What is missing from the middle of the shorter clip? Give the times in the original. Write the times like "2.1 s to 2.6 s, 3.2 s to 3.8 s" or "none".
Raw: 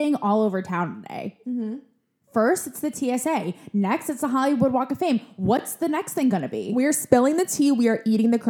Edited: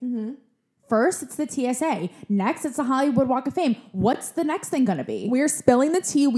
none